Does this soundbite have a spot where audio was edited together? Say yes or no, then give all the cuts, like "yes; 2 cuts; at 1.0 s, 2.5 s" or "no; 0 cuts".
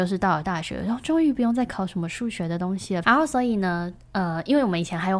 yes; 1 cut; at 3.0 s